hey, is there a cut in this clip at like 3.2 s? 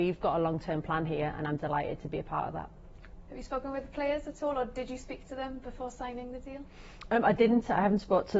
no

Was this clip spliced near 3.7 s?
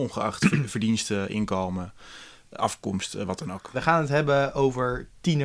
yes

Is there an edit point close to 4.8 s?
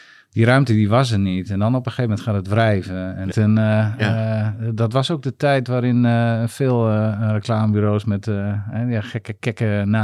no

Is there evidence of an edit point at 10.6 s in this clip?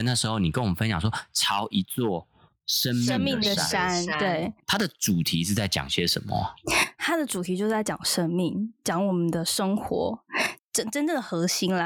yes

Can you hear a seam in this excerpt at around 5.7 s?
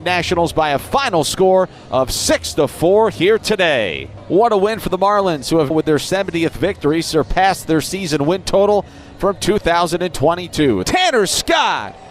yes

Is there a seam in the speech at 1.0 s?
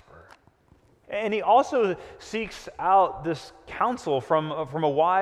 yes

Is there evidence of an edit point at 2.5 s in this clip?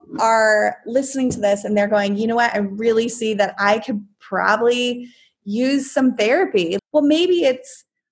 no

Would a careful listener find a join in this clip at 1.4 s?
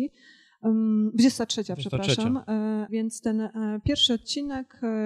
no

